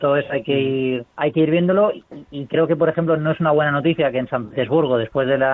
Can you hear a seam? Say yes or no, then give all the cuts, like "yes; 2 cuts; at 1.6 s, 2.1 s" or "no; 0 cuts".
yes; 1 cut; at 1.1 s